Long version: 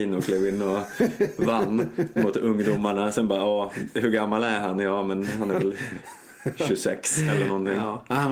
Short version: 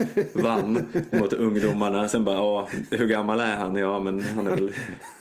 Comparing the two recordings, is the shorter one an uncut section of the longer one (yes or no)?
yes